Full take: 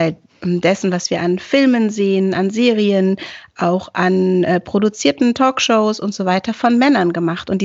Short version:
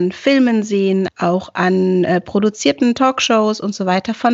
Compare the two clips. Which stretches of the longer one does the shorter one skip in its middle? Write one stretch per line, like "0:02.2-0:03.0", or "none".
0:02.3-0:03.5